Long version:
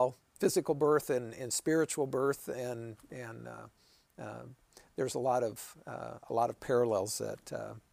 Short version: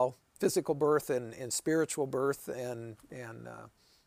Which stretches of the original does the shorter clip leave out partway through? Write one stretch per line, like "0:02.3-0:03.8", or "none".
none